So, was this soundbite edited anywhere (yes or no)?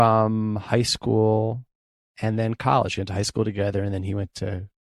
no